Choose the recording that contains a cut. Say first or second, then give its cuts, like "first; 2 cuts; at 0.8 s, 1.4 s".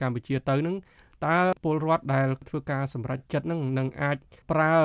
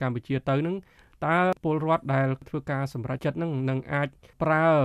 second; 1 cut; at 3.2 s